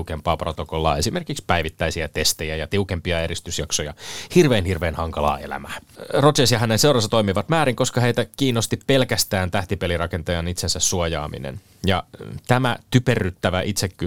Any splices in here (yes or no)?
no